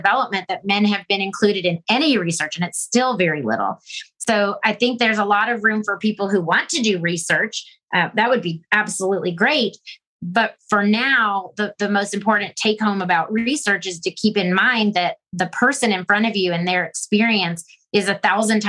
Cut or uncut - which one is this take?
cut